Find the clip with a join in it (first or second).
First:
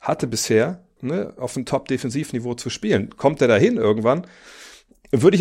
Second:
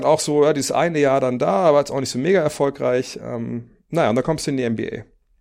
first